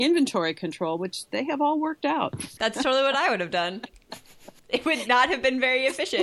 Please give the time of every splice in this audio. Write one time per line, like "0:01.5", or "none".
0:02.6
0:04.6